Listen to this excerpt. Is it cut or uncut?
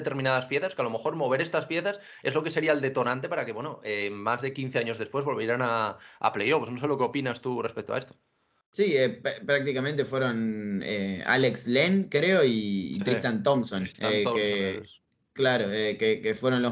uncut